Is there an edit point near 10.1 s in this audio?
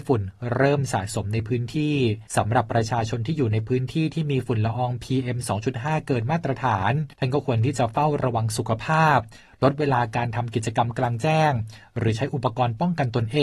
no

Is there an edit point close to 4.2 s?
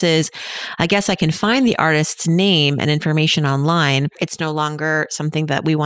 yes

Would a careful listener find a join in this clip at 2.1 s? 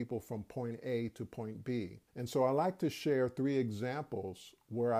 yes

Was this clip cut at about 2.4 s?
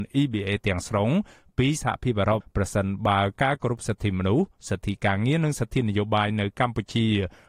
yes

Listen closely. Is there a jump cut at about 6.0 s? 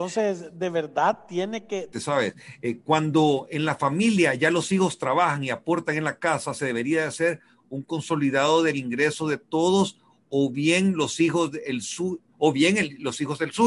no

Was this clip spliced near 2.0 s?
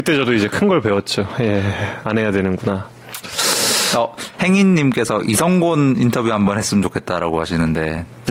yes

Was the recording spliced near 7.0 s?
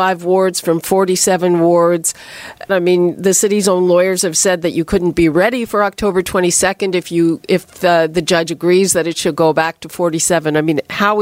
no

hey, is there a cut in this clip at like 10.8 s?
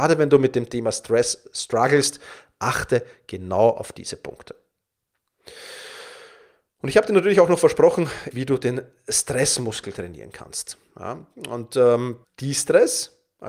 no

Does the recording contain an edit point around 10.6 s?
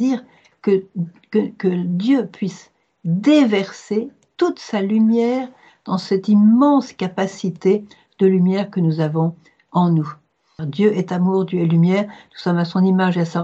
yes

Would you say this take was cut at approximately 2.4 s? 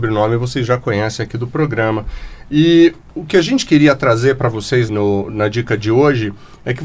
no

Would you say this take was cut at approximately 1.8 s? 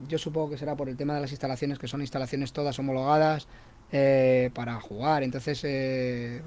no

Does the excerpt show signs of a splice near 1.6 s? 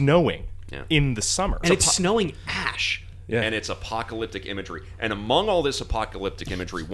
yes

